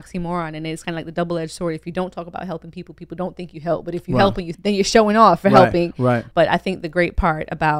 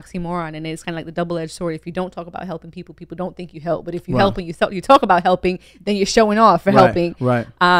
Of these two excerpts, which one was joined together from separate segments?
first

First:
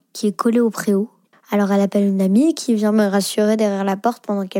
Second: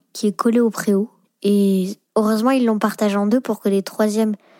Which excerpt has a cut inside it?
first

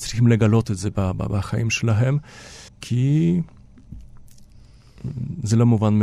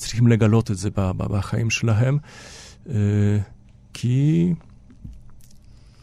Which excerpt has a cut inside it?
first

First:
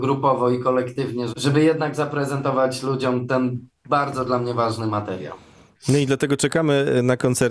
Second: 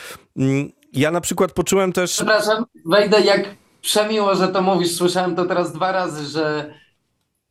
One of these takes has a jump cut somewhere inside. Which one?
first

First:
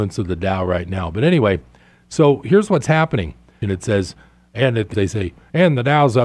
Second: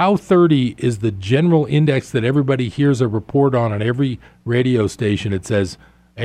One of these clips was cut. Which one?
first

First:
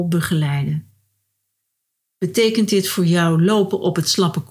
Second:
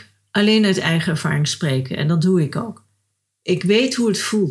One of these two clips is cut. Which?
second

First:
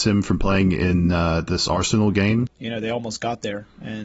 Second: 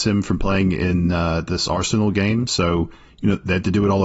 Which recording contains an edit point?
first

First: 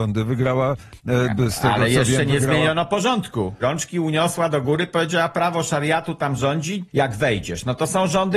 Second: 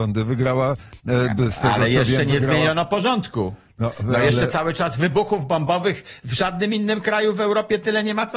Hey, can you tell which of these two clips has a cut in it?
first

